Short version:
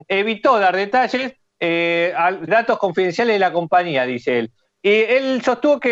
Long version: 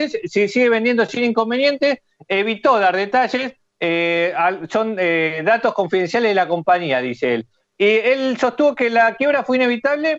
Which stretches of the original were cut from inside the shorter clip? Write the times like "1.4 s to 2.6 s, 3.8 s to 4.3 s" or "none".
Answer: 4.7 s to 5.4 s